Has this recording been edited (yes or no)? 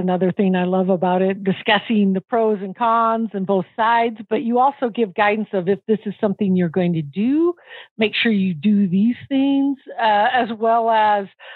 no